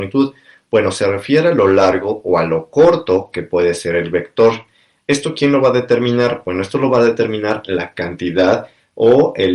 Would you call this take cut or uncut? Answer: uncut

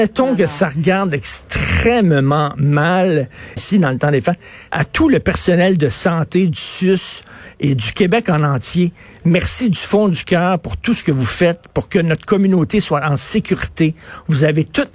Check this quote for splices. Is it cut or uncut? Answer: cut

